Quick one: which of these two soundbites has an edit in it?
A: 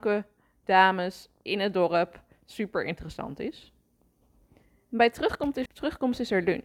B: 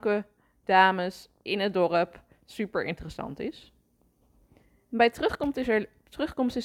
A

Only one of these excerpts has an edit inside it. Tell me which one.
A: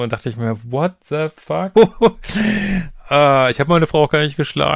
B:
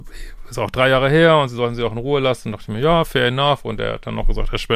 A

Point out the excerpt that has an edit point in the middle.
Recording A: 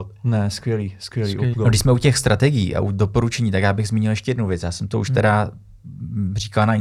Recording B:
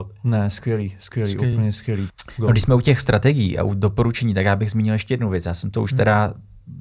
A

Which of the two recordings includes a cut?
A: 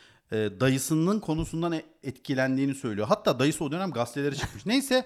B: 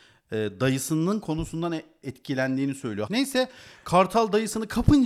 B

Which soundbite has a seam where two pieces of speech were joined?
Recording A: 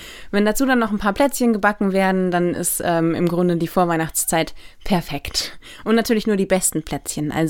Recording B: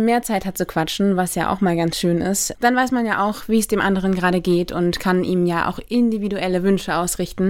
B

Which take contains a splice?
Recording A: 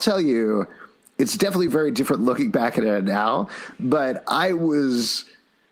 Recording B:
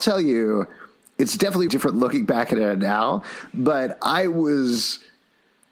B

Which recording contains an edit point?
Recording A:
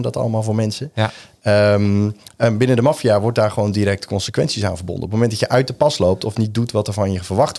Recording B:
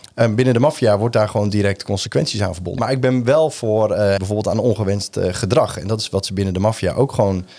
B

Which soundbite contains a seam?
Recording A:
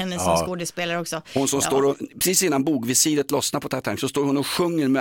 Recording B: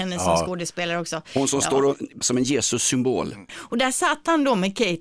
B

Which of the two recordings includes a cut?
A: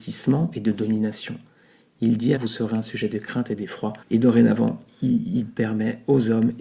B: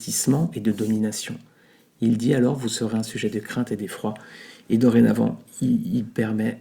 A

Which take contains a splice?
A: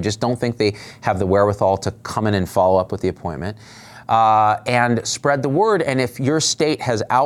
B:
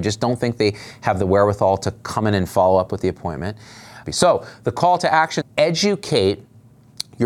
B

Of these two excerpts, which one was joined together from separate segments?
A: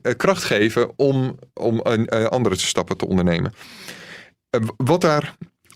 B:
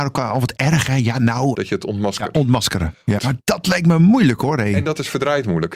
B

